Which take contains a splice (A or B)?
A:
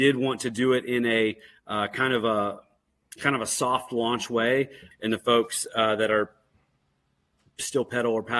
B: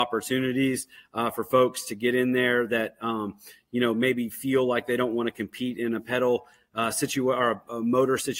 A